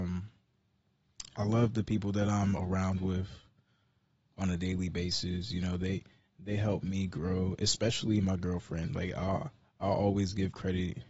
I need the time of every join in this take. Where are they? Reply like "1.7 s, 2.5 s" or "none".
none